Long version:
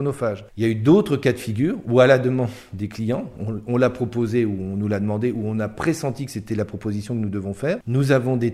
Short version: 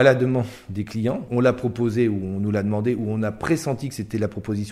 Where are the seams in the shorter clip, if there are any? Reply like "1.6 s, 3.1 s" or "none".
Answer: 1.3 s